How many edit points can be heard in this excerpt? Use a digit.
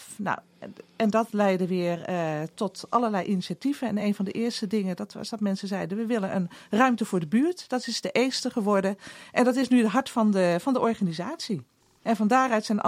0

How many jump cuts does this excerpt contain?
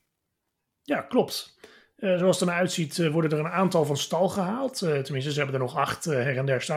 0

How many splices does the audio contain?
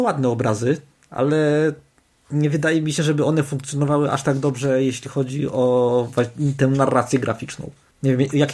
0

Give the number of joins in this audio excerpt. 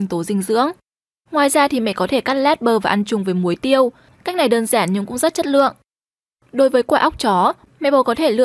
1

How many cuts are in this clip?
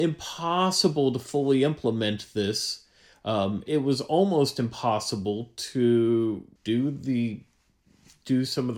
2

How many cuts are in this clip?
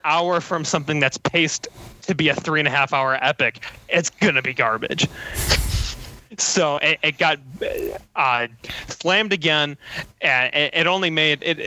0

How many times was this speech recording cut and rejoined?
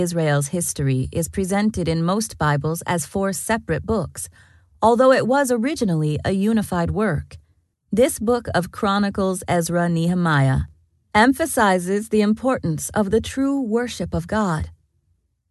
1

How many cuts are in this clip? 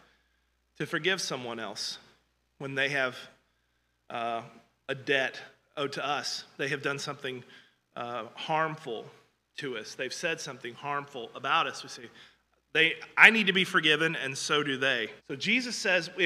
1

